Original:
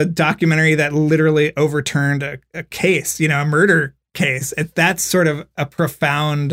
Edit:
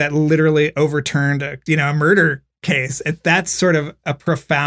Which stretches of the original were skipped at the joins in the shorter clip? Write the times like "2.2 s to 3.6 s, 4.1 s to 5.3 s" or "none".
2.5 s to 3.2 s